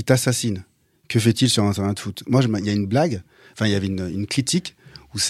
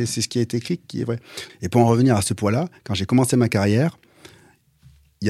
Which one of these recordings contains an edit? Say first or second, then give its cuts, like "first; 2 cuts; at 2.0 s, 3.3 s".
second; 1 cut; at 1.5 s